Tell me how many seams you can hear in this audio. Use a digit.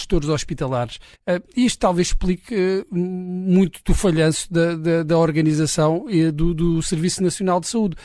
1